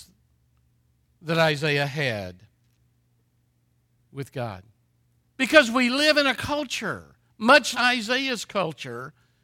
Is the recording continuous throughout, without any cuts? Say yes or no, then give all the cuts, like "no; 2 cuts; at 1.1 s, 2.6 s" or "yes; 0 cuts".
no; 2 cuts; at 5.2 s, 7.7 s